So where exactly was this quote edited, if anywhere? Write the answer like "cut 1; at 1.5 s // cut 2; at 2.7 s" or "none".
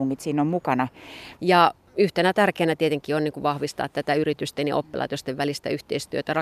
cut 1; at 1.4 s